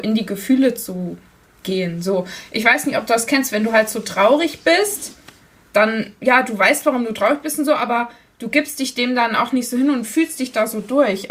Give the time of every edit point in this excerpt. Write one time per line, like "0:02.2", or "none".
none